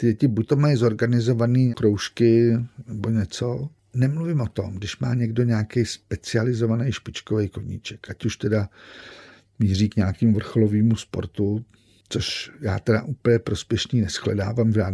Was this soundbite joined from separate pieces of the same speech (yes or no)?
no